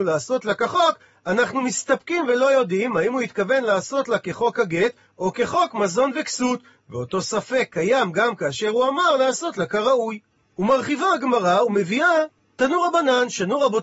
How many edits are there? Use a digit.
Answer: 0